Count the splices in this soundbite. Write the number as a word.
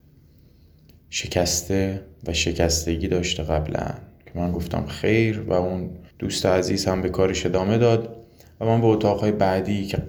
one